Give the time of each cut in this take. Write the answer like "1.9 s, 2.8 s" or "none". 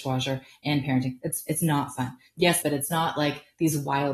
2.6 s